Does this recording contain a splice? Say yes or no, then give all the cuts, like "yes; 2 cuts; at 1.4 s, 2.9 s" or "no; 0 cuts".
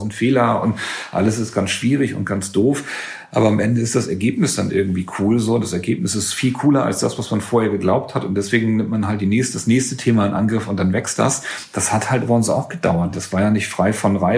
no; 0 cuts